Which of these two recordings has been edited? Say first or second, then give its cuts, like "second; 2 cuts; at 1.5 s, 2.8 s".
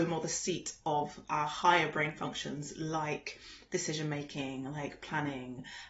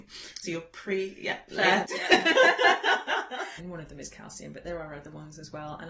second; 1 cut; at 3.6 s